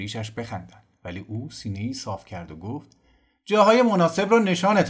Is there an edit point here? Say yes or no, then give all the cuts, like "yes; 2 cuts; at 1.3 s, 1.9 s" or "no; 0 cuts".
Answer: no; 0 cuts